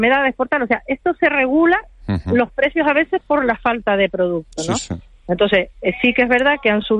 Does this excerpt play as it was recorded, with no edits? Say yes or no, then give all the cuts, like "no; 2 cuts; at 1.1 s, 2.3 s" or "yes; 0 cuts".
yes; 0 cuts